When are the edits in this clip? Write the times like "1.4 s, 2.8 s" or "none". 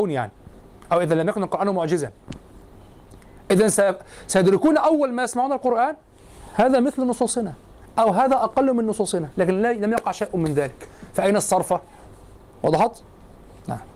none